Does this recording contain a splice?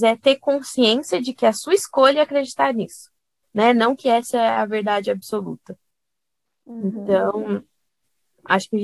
no; 0 cuts

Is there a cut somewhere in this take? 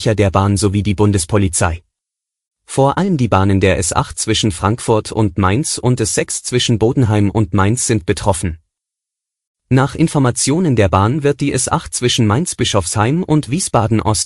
yes; 1 cut; at 2.5 s

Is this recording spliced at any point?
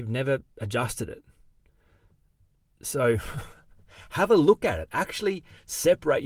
no; 0 cuts

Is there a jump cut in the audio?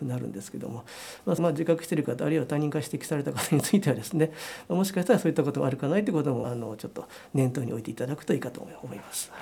yes; 2 cuts; at 1.4 s, 6.4 s

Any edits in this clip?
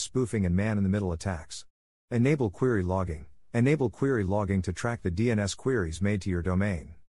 no; 0 cuts

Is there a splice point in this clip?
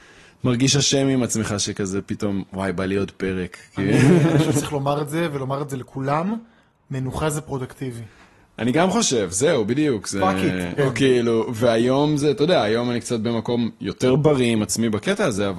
yes; 1 cut; at 10.8 s

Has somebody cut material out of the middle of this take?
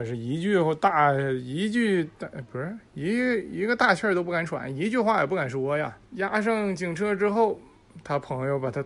yes; 1 cut; at 6.1 s

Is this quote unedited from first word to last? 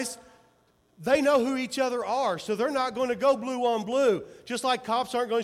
yes; 0 cuts

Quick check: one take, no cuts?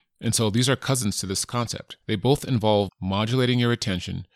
no; 1 cut; at 2.0 s

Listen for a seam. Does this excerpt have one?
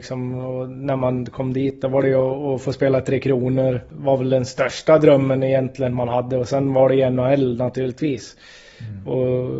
no; 0 cuts

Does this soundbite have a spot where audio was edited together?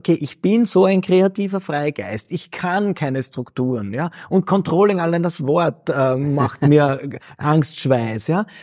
no; 0 cuts

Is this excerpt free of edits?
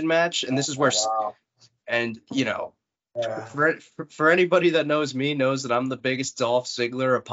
yes; 0 cuts

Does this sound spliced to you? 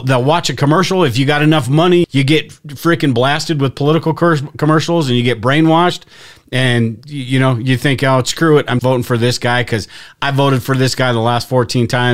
yes; 2 cuts; at 2.0 s, 8.8 s

